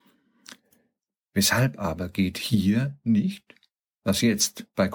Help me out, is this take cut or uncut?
uncut